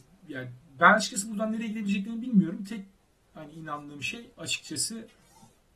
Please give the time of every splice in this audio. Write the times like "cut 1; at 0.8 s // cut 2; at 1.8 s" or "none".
cut 1; at 4.3 s